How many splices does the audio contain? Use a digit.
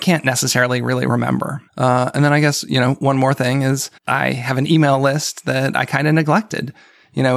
2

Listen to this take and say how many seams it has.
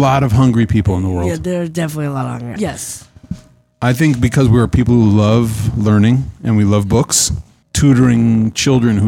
2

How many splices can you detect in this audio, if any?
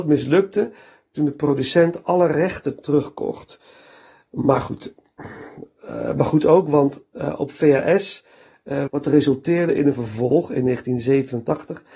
1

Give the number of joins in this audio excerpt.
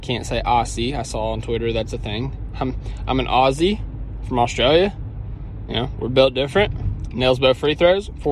1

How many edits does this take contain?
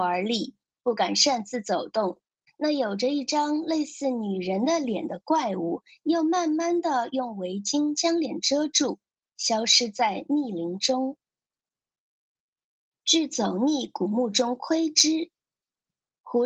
2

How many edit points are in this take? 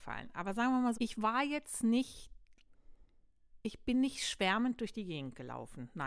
1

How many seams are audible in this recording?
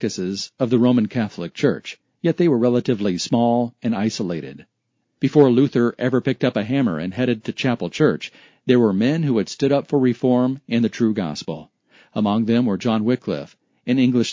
1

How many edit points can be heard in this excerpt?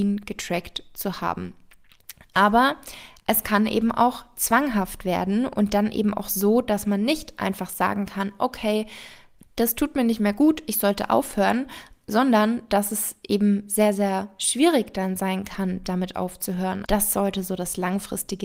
1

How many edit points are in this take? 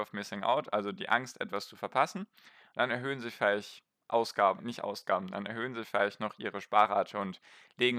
1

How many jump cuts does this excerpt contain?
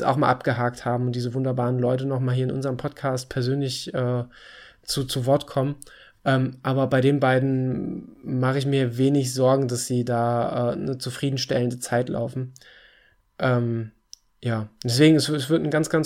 0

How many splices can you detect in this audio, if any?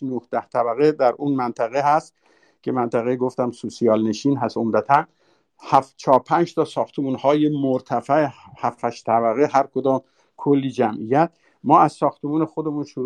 0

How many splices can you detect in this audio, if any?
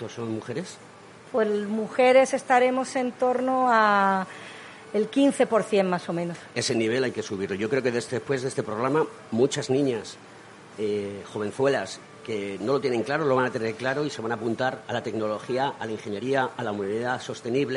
0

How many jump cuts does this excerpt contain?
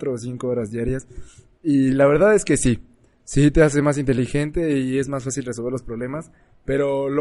0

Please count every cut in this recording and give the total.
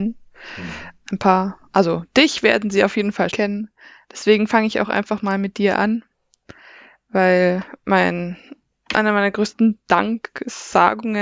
1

